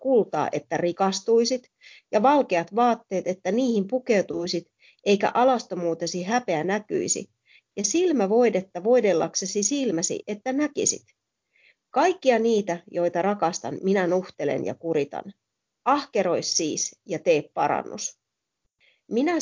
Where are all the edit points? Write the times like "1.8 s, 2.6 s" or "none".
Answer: none